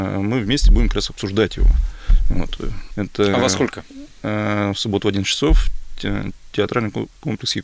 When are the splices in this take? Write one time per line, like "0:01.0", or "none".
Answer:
0:02.9